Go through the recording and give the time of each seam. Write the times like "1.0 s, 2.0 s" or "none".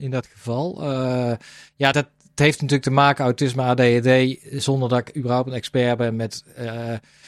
none

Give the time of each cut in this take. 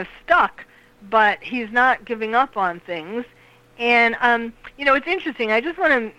none

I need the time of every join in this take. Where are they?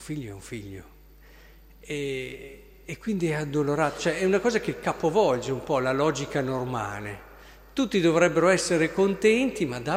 none

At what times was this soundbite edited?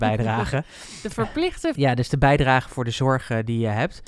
1.7 s

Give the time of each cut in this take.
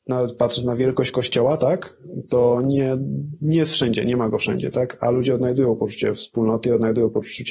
none

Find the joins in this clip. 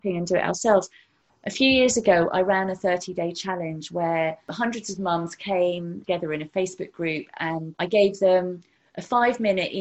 none

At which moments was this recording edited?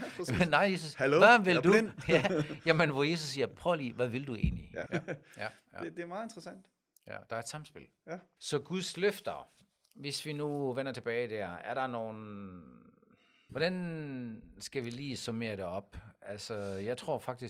4.9 s, 8.4 s, 13.5 s

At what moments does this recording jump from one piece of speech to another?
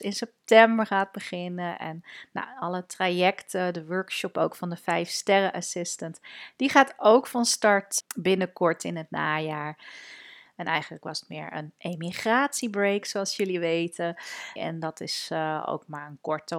8.0 s, 10.5 s, 14.6 s

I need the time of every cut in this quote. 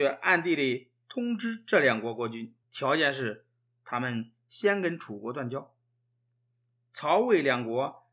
2.6 s

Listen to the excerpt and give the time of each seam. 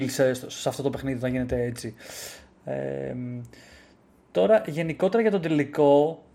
none

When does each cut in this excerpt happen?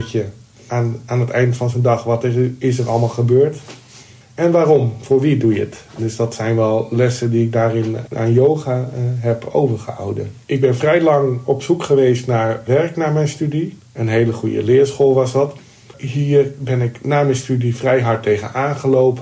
10.4 s, 13.8 s

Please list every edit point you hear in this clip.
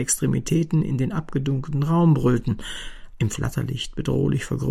3.1 s

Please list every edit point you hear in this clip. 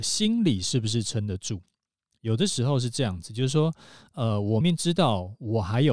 4.6 s

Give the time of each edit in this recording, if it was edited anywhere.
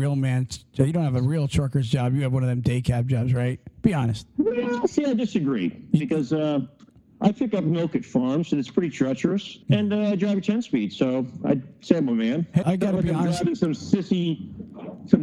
9.6 s, 12.6 s

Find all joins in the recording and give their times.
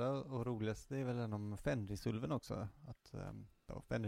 none

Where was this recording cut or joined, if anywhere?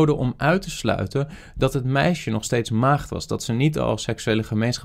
none

